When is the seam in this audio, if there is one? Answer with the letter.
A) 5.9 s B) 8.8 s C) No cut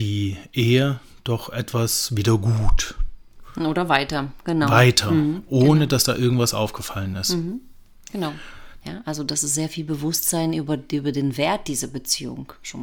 B